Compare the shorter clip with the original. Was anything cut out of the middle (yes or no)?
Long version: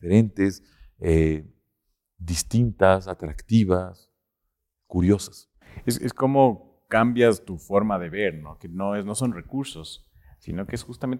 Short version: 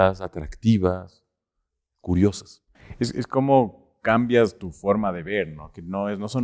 no